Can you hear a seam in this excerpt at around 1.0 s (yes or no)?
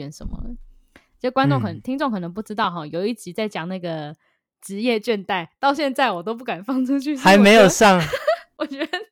no